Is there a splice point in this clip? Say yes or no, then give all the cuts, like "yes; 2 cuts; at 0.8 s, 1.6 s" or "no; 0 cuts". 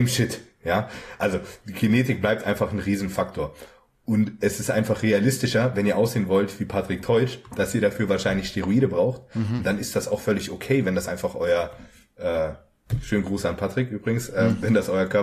no; 0 cuts